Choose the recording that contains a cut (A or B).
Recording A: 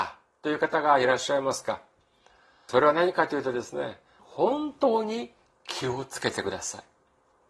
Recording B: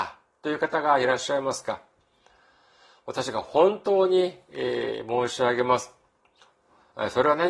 A